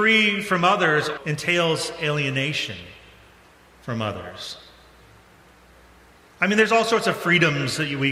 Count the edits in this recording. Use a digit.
1